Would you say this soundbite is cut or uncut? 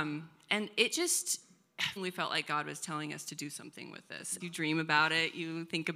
cut